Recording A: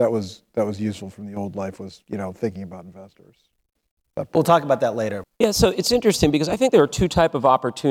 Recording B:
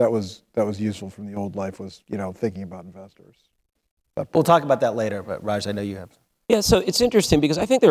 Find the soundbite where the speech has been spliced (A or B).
A